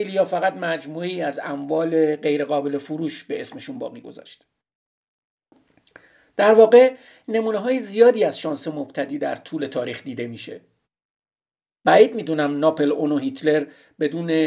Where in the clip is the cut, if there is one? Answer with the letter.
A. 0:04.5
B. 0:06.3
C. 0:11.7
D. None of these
D